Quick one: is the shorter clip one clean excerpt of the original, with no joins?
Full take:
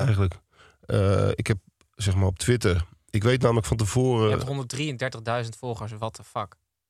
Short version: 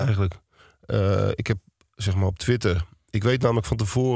yes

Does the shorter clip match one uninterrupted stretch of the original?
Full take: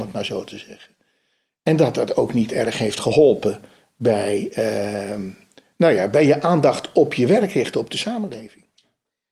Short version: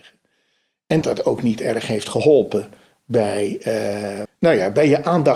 no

